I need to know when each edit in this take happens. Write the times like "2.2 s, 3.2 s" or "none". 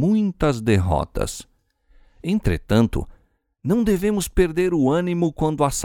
none